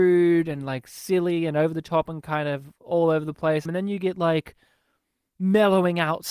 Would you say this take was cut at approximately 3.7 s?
yes; 1 cut; at 3.7 s

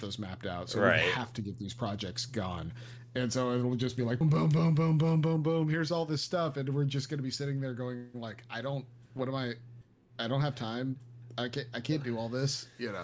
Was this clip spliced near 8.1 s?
no; 1 cut; at 4.2 s

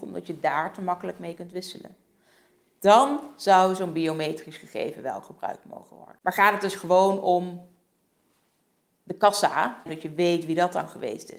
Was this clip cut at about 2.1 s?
no; 1 cut; at 9.9 s

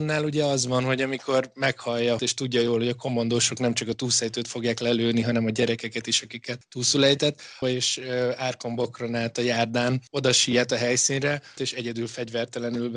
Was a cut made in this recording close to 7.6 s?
yes; 3 cuts; at 2.2 s, 7.6 s, 11.6 s

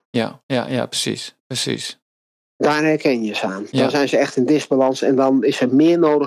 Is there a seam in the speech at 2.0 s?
no; 0 cuts

